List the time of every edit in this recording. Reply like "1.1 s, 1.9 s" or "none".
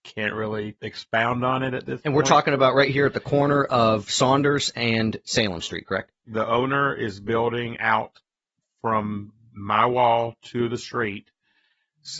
6.2 s